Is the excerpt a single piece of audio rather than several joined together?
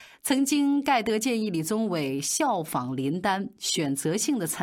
yes; 0 cuts

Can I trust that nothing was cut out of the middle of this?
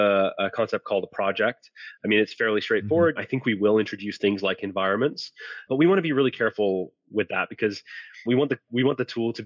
no; 3 cuts; at 3.2 s, 5.7 s, 8.3 s

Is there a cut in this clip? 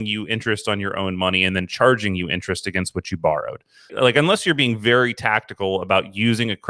yes; 1 cut; at 3.9 s

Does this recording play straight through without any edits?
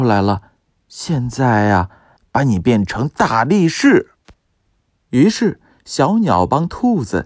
no; 1 cut; at 2.2 s

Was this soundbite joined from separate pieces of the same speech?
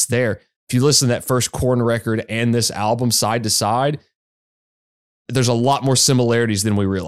no; 0 cuts

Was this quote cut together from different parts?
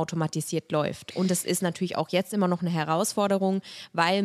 no; 0 cuts

